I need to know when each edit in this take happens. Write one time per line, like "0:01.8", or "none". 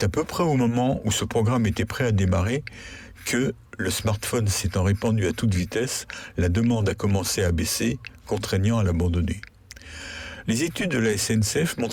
0:10.4